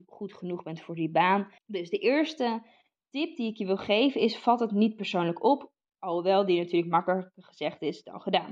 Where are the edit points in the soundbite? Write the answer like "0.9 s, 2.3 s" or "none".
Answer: 1.6 s